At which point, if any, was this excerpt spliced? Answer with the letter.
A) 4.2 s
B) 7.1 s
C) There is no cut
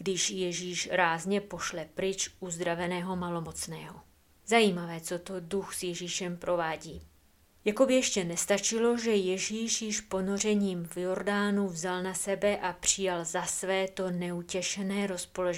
C